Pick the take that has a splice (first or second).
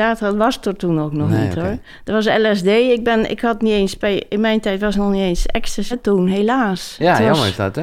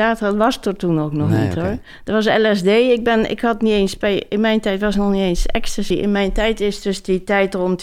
first